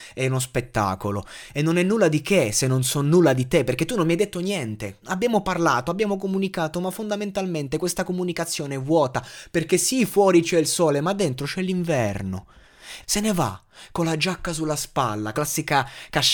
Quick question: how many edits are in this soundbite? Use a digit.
3